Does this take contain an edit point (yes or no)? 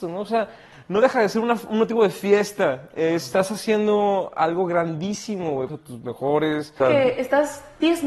yes